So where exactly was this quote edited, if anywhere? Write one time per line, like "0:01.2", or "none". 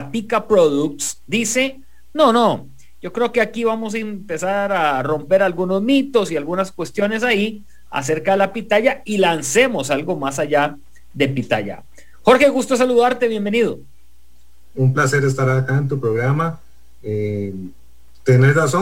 0:14.7